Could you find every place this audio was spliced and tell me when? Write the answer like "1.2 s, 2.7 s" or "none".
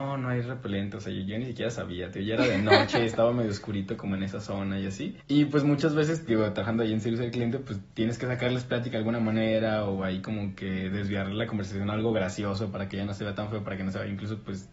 5.2 s